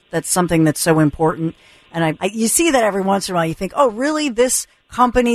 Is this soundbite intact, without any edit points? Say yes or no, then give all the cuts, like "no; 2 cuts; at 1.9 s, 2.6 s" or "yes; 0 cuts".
no; 1 cut; at 2.2 s